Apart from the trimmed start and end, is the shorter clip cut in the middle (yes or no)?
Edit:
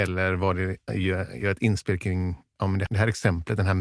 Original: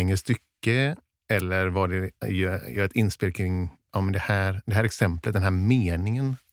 yes